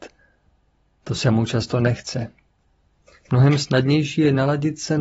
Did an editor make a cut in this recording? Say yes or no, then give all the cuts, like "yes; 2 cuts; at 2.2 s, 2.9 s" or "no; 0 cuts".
no; 0 cuts